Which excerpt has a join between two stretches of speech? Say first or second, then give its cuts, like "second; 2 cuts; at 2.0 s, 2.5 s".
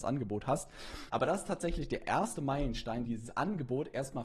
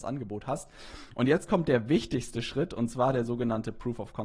first; 2 cuts; at 1.1 s, 3.1 s